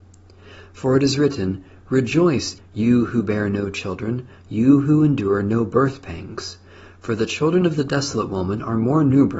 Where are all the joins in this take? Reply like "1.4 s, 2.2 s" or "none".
2.6 s, 4.4 s